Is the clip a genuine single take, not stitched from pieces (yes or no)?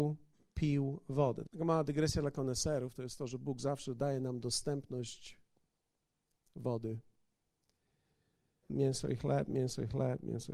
no